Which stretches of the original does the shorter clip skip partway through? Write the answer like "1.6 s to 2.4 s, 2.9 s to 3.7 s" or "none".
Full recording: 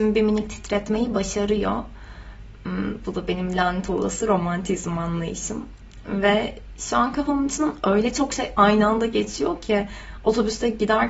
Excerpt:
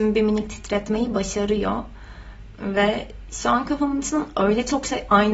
2.6 s to 6.0 s